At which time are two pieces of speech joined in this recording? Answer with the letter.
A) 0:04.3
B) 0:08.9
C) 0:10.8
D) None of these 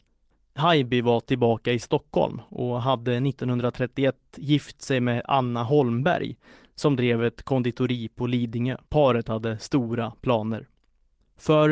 B